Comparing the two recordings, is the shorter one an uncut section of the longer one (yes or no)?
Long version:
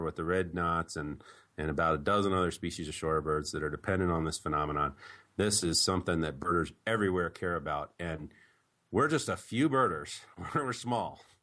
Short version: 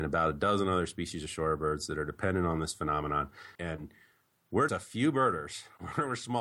no